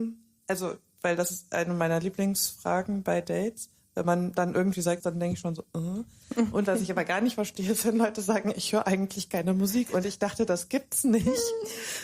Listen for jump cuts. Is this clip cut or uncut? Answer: cut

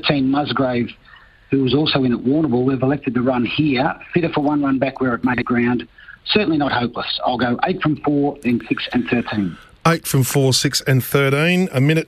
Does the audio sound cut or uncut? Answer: uncut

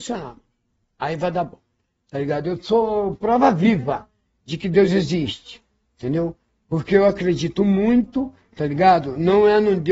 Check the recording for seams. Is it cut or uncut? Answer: uncut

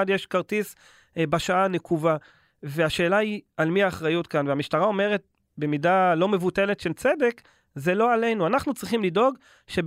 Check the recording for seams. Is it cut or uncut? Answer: uncut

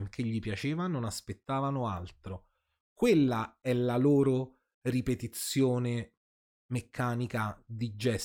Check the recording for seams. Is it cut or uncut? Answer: uncut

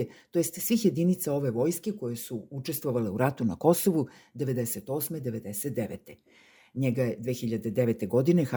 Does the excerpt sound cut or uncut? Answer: uncut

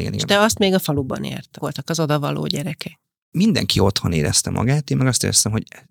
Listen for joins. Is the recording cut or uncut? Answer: cut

